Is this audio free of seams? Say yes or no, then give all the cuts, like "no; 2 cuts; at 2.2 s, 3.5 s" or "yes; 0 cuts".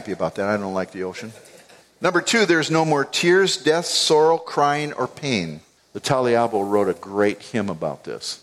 no; 2 cuts; at 1.8 s, 5.8 s